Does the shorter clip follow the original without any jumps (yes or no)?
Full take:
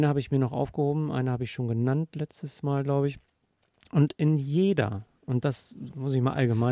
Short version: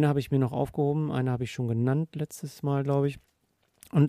yes